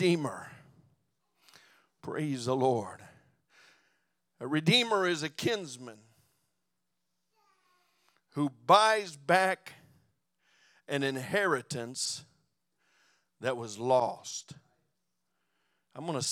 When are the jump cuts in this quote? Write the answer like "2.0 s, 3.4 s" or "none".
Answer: none